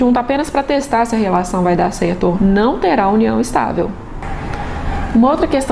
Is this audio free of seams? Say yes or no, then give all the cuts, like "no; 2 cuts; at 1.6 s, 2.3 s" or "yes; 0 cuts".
no; 1 cut; at 2.4 s